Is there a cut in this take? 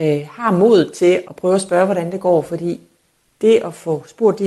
yes; 1 cut; at 1.3 s

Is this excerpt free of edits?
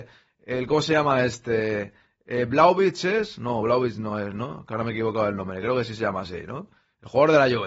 yes; 0 cuts

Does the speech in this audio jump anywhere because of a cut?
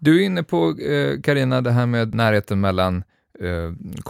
no; 0 cuts

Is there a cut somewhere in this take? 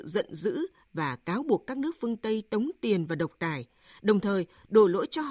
no; 0 cuts

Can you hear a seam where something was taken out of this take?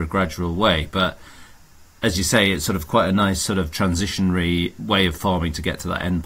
no; 0 cuts

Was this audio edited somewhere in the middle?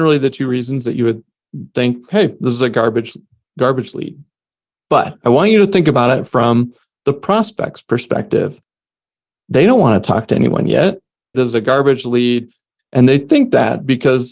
yes; 2 cuts; at 11.3 s, 12.8 s

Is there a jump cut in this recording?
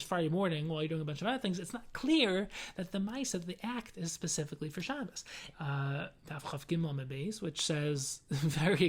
yes; 1 cut; at 5.5 s

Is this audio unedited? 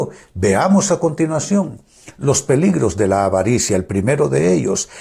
yes; 0 cuts

